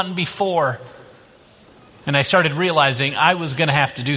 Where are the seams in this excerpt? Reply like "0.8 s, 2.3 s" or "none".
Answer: none